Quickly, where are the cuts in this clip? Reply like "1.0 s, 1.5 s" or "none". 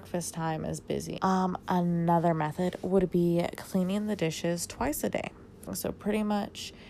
1.2 s, 5.7 s

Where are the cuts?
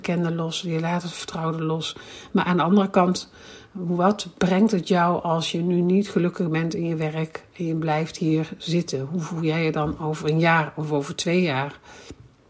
none

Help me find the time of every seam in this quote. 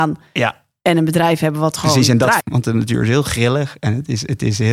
2.4 s

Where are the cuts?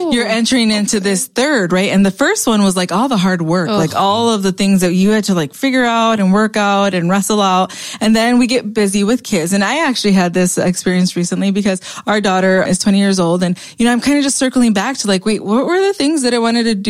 12.7 s

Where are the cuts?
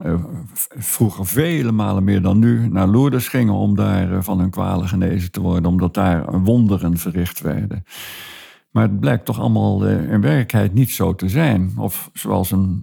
none

